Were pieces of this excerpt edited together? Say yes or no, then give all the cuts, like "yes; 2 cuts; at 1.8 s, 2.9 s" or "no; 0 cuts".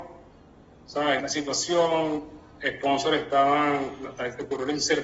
yes; 1 cut; at 1.2 s